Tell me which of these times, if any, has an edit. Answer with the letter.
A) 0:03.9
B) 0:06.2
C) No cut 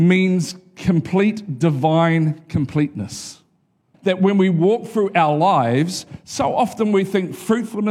A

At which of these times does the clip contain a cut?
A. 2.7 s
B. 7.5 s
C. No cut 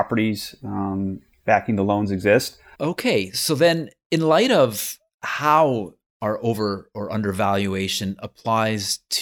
A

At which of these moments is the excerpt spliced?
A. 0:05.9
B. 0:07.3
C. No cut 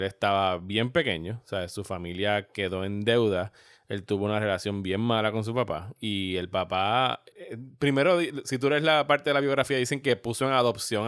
B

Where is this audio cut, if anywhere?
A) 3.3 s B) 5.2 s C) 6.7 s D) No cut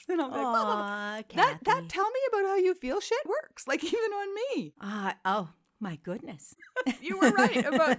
A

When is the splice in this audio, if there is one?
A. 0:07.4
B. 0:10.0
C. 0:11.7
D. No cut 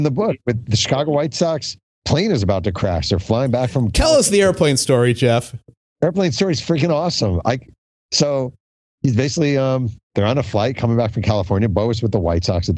B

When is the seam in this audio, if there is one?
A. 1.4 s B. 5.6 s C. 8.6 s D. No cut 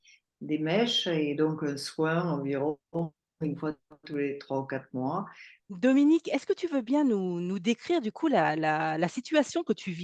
B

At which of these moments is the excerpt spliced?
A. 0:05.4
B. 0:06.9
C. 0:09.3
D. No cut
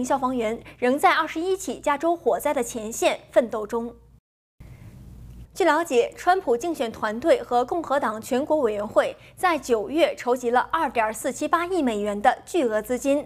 A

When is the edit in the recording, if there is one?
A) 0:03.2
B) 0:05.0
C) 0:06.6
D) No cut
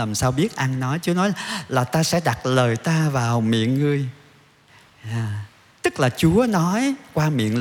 D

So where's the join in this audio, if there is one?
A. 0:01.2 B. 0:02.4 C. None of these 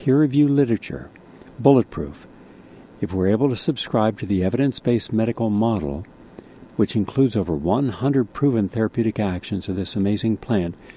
C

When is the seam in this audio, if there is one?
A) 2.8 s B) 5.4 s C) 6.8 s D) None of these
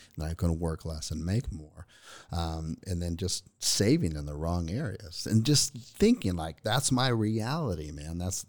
A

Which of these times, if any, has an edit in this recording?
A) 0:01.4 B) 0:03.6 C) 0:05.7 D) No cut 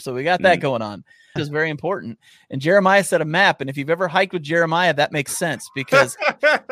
A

